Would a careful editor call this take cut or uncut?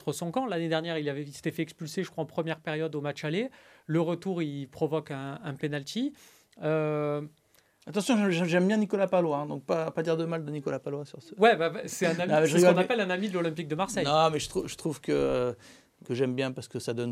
cut